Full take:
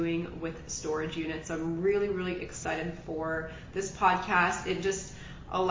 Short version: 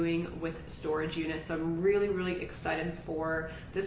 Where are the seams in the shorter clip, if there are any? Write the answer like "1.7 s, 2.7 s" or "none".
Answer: none